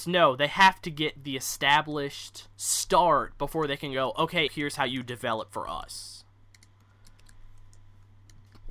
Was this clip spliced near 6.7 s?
no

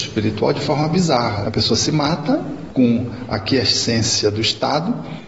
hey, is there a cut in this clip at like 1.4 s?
yes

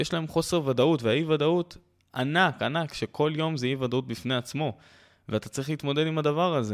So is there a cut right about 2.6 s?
yes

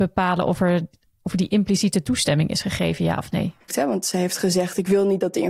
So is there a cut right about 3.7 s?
yes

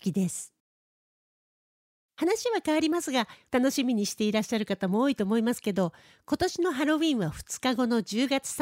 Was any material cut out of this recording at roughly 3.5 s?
yes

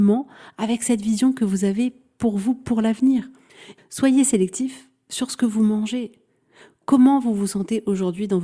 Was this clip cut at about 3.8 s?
yes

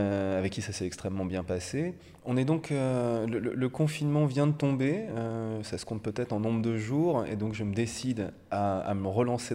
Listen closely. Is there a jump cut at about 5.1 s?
no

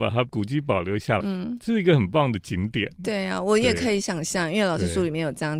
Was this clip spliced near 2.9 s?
no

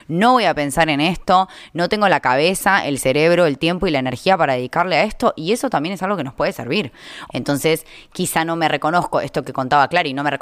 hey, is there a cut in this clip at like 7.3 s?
yes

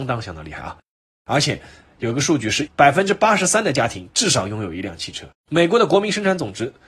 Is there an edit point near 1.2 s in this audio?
no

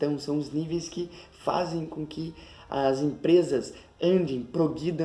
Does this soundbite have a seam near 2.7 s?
no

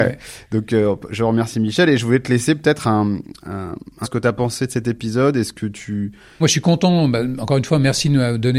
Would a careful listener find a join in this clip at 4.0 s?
yes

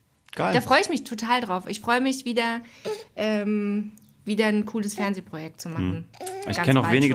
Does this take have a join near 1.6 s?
no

